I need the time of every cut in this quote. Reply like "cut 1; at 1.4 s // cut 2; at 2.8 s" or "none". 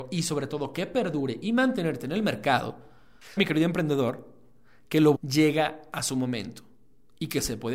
cut 1; at 3.4 s // cut 2; at 5.1 s